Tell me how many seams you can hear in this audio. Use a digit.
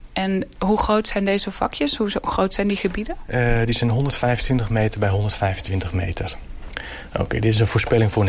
0